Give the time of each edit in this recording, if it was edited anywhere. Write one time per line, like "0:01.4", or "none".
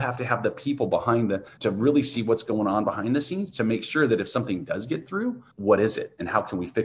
0:01.6
0:05.5